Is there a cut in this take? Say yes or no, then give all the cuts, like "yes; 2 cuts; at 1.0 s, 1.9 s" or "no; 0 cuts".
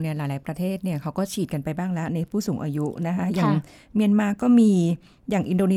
no; 0 cuts